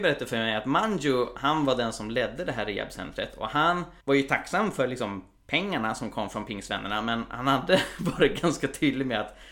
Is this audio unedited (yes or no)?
no